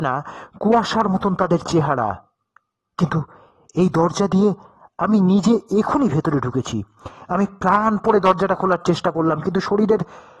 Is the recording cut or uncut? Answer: cut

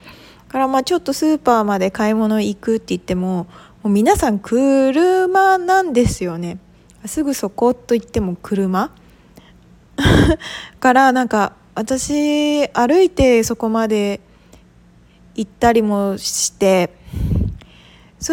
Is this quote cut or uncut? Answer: uncut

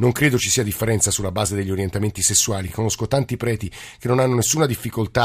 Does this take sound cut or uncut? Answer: uncut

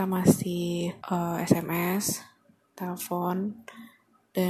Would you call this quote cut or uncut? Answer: cut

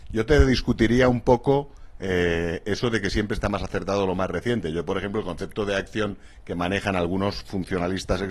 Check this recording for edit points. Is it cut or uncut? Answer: cut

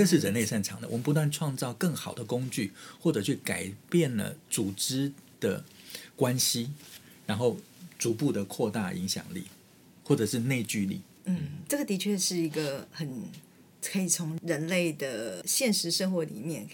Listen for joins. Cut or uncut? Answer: uncut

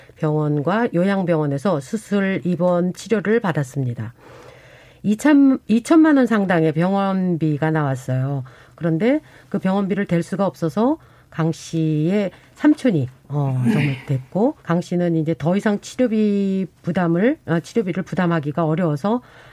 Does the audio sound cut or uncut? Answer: cut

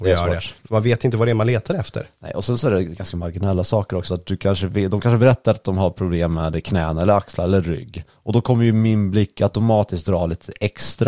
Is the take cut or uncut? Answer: cut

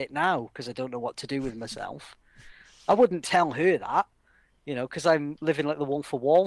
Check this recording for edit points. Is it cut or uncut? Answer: uncut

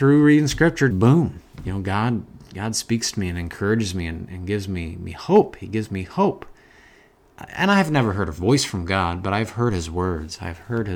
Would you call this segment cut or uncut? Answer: cut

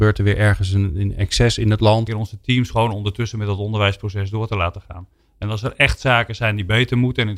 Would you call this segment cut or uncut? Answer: cut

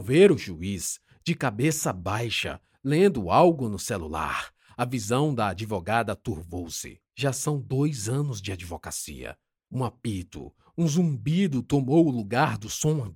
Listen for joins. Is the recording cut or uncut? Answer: cut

